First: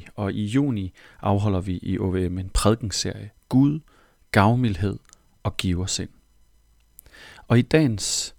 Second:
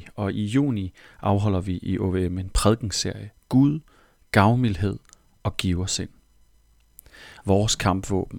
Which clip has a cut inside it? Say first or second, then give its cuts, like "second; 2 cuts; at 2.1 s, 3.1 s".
second; 1 cut; at 7.4 s